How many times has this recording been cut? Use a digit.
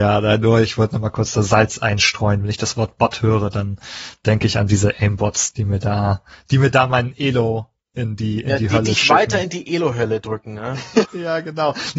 2